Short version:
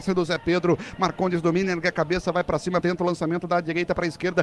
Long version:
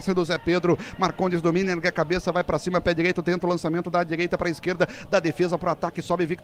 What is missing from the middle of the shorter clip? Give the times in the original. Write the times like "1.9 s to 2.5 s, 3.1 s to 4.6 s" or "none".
2.8 s to 3.2 s